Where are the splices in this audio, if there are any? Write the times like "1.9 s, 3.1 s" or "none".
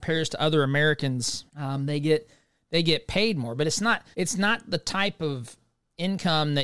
1.5 s, 4.1 s